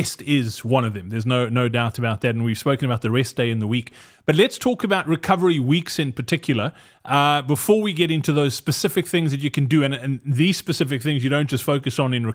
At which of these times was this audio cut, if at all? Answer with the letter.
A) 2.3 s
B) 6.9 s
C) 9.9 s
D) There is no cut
D